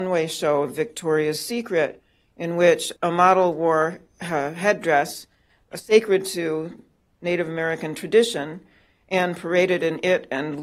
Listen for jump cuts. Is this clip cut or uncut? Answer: cut